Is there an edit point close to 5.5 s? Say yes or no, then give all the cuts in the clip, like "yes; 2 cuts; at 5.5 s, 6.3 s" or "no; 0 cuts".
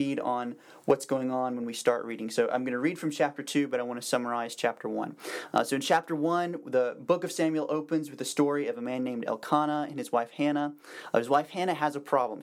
no; 0 cuts